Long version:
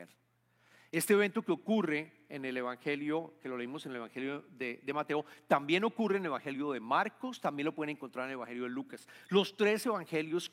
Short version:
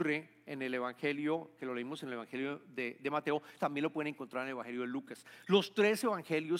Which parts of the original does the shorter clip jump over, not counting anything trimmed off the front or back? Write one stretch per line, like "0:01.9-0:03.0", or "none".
0:05.4-0:07.4